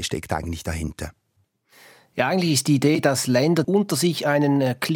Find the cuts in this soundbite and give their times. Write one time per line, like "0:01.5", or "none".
0:03.6